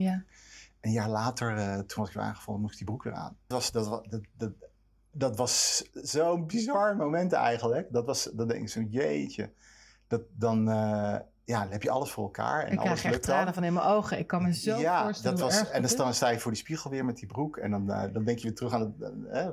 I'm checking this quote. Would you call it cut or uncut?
cut